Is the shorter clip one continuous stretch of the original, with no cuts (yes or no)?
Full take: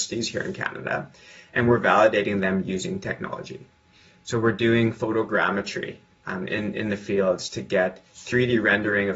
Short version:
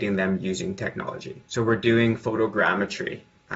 no